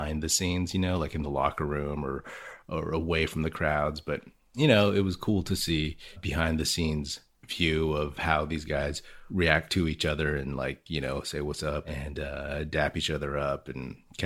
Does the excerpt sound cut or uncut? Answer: cut